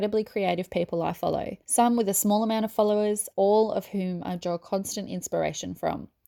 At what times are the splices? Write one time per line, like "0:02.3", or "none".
0:01.6
0:03.3